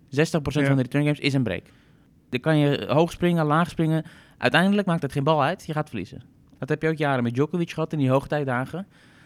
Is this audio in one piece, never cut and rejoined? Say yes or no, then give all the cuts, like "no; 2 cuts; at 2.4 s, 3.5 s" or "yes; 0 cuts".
yes; 0 cuts